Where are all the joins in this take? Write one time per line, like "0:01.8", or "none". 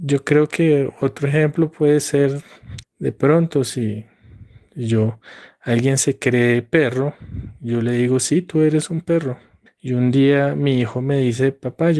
0:02.8
0:09.7